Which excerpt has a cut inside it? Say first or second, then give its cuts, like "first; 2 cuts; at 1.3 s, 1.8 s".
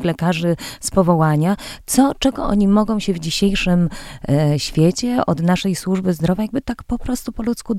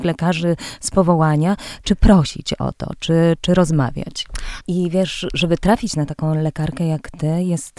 second; 2 cuts; at 1.8 s, 4.6 s